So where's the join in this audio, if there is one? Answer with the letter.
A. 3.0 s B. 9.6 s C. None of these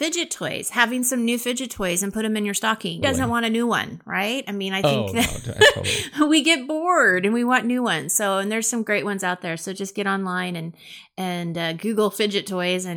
A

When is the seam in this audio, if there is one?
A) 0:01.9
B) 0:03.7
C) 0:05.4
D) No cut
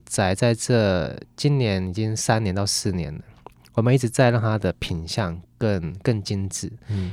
D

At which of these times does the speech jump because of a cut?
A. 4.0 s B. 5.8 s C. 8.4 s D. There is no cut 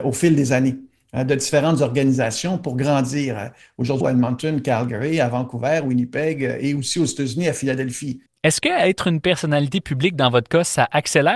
A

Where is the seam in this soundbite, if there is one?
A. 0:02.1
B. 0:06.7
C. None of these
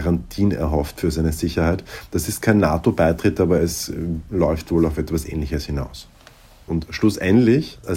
B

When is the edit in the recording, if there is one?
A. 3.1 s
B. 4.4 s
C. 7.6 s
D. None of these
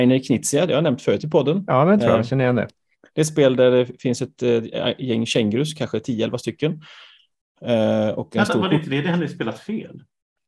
A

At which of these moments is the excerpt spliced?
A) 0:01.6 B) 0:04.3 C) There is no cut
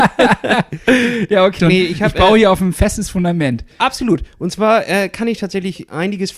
A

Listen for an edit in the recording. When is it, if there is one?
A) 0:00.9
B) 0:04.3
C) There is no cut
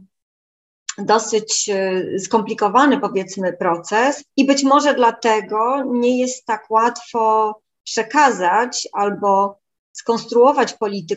B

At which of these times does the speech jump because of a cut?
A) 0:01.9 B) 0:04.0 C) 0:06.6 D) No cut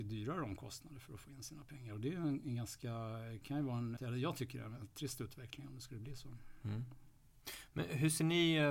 B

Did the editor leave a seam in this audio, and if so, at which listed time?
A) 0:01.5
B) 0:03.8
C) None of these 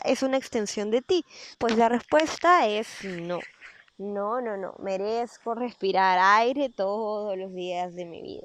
A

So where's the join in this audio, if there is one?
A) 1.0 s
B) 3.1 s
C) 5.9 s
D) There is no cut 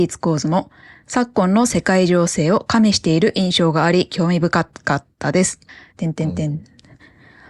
C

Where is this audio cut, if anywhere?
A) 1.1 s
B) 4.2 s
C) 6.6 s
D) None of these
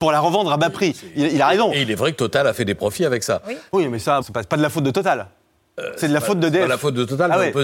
B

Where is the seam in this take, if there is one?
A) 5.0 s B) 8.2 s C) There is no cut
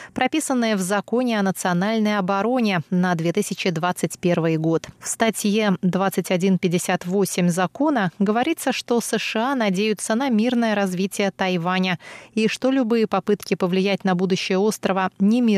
A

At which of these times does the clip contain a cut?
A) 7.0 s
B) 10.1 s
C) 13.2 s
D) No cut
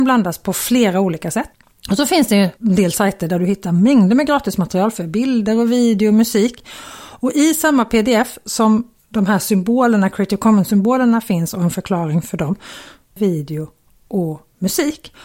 C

